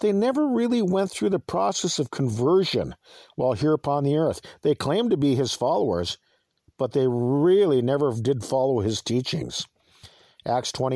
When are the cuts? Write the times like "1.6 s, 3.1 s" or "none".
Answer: none